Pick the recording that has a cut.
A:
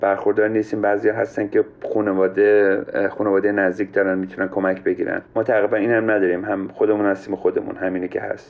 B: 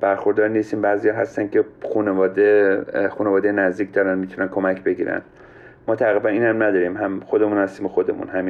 A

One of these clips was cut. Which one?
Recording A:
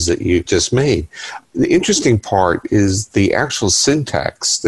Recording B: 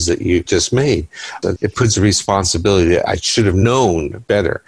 B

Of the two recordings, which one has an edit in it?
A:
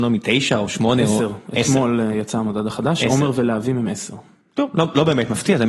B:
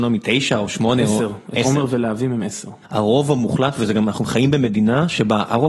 B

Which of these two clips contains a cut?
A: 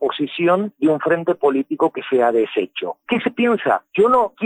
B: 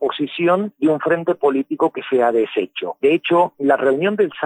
B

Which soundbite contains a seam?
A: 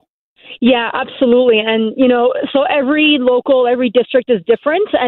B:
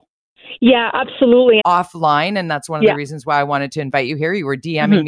B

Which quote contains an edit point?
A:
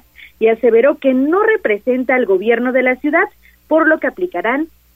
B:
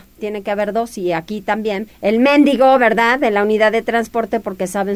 B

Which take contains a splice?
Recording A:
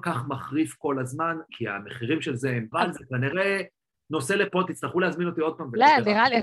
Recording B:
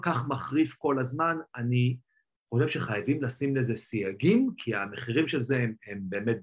A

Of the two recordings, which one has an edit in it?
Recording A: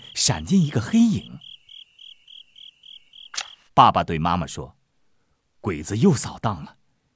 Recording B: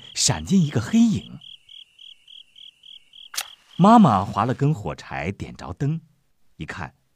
A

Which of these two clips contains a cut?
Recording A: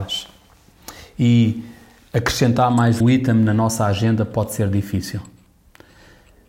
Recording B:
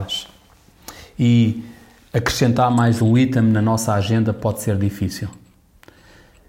A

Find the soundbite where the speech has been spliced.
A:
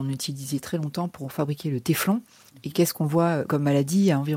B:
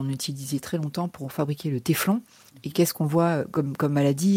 A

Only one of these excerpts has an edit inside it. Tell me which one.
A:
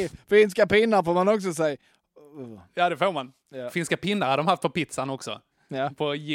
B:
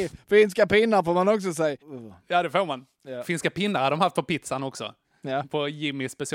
B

